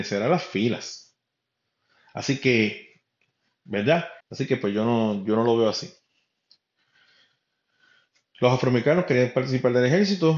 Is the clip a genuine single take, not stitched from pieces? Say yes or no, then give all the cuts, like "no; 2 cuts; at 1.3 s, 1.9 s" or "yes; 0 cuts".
no; 1 cut; at 4.2 s